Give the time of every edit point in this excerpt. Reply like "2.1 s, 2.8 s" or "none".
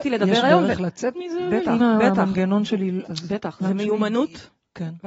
1.8 s, 3.0 s